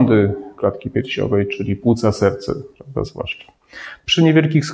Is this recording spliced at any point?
no; 0 cuts

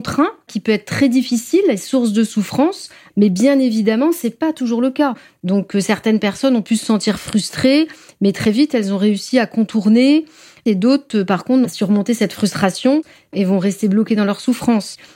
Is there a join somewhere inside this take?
yes; 3 cuts; at 3.1 s, 5.3 s, 11.6 s

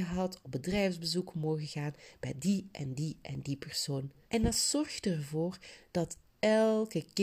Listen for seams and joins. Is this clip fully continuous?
no; 1 cut; at 4.2 s

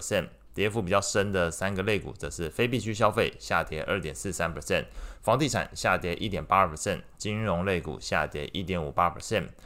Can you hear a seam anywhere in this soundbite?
yes; 1 cut; at 7.1 s

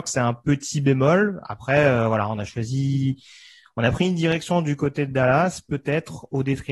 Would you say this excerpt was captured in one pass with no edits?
yes; 0 cuts

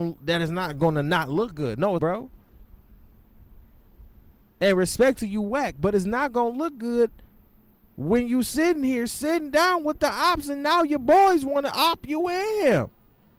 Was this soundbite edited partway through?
yes; 1 cut; at 2.0 s

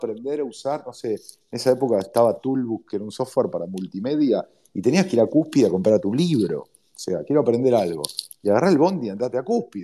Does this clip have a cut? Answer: no; 0 cuts

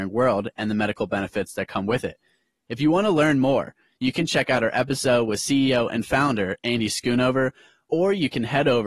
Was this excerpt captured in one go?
yes; 0 cuts

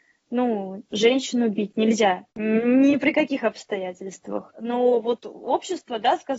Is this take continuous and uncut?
no; 2 cuts; at 2.3 s, 4.5 s

